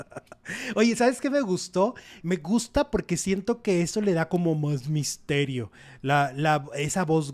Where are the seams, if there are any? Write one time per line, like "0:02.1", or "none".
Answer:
0:02.2